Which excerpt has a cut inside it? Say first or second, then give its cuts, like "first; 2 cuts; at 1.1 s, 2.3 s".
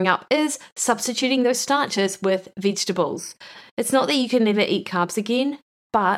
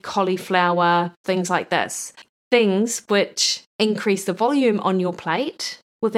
second; 1 cut; at 1.2 s